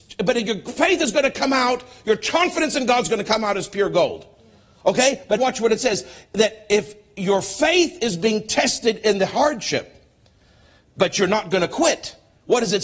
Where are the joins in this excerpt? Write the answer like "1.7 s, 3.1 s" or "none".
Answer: 5.4 s